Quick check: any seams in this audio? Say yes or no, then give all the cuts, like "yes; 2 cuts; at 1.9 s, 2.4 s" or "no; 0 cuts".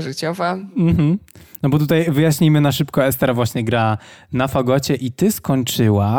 no; 0 cuts